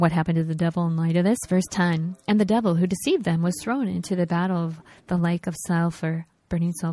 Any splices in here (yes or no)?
no